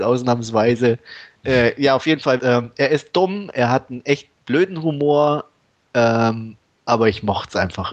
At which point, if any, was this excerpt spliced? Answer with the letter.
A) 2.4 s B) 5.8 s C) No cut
A